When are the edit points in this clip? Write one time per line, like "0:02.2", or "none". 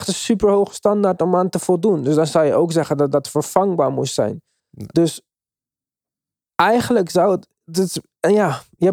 0:04.6